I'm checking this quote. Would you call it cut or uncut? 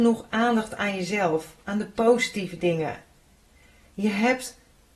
uncut